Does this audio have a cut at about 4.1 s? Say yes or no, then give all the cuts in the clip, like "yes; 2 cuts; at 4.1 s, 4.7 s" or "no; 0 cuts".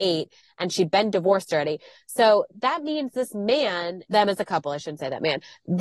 yes; 1 cut; at 4.1 s